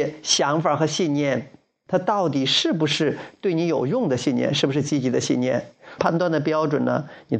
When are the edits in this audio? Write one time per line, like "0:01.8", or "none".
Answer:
0:06.0